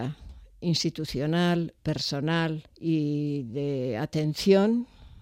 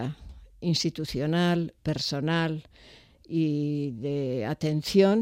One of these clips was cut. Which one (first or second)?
first